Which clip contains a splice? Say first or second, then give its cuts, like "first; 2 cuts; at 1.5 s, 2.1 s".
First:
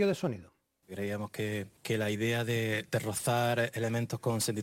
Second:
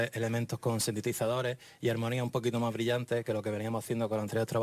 first; 1 cut; at 1.8 s